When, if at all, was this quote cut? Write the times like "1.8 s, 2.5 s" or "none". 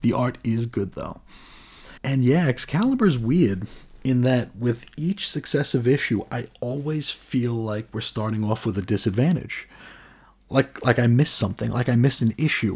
2.0 s